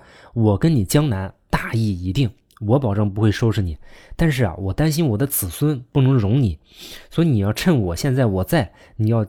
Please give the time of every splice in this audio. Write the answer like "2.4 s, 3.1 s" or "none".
none